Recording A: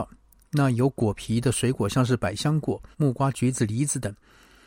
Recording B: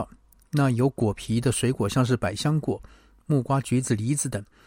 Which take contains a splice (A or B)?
A